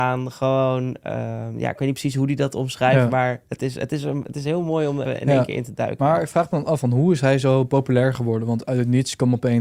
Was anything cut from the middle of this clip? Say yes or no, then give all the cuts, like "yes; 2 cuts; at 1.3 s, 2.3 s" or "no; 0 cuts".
yes; 1 cut; at 5.0 s